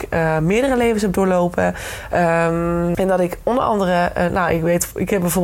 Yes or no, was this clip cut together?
yes